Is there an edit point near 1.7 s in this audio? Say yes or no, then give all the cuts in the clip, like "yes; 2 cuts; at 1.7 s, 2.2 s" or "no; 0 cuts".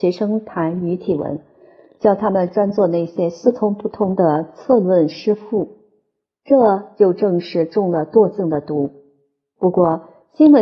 no; 0 cuts